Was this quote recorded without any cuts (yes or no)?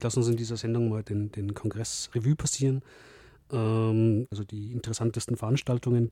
no